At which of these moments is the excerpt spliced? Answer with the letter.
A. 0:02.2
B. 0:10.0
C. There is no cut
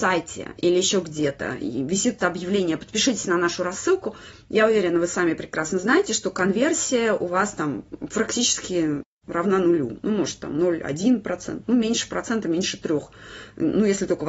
A